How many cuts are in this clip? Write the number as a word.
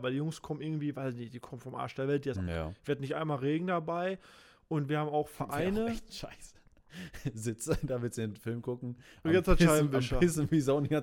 one